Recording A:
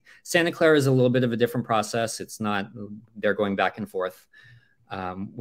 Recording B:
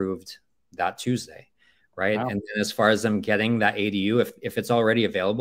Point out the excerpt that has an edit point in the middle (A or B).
A